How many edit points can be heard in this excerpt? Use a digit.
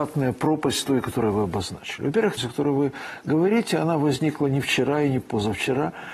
1